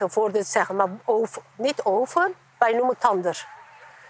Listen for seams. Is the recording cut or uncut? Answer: cut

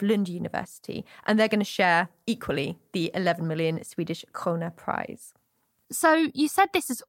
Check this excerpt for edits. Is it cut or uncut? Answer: uncut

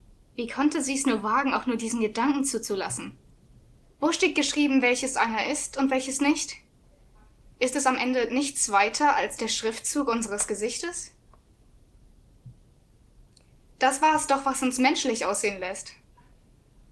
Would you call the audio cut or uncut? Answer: cut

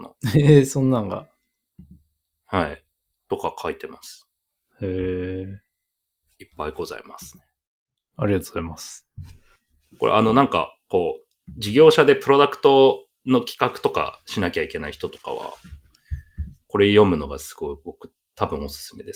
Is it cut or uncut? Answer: uncut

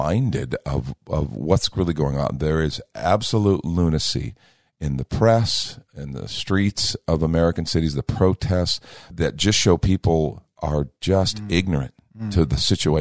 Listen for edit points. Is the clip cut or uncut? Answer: uncut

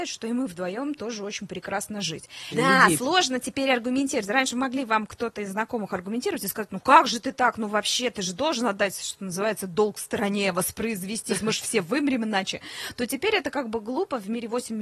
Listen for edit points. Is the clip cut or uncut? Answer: cut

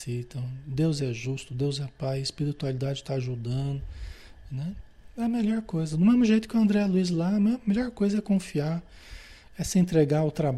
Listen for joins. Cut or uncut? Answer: uncut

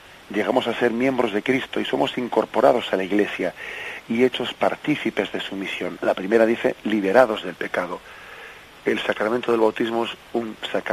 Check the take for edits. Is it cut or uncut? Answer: cut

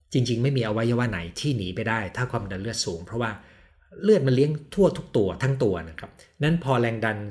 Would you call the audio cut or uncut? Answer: uncut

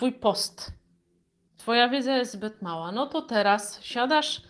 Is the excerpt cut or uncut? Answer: cut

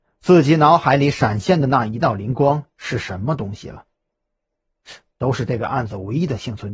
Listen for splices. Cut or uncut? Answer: cut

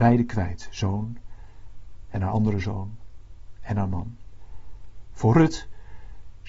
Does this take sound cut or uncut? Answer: cut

